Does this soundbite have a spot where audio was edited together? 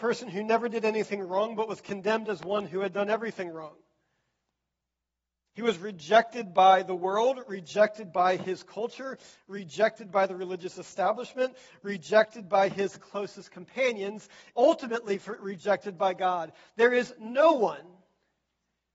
yes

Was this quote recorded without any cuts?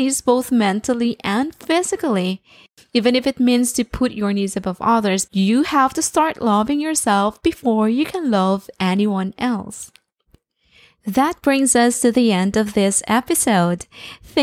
no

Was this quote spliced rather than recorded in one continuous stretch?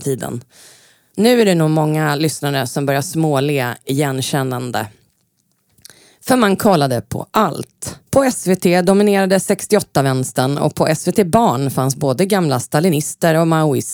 yes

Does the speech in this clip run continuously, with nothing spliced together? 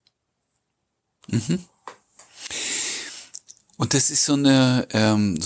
yes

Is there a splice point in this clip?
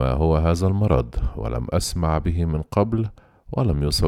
no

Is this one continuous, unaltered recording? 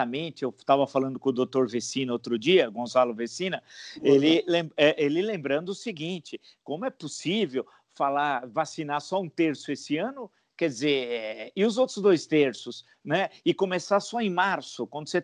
yes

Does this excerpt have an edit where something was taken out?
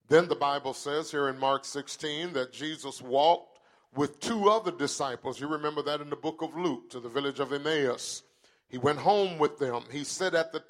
no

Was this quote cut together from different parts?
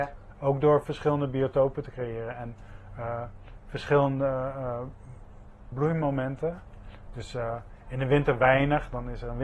yes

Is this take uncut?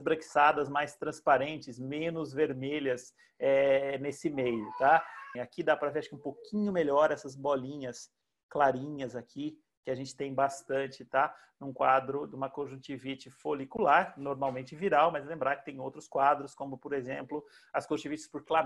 no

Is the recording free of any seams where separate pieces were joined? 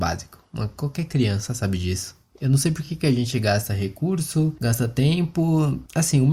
yes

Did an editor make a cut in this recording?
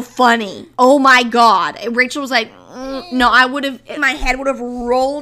yes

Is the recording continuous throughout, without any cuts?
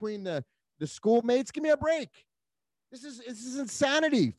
yes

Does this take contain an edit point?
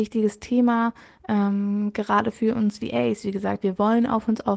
yes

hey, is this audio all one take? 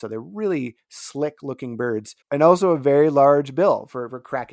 no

